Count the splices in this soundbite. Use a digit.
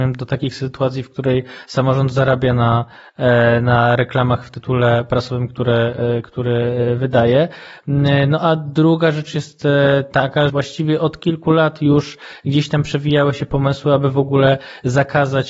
1